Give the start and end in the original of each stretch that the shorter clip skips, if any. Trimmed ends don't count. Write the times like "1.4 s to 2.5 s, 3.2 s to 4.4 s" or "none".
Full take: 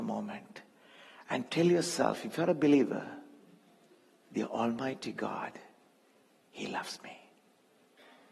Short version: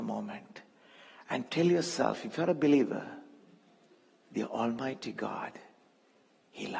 none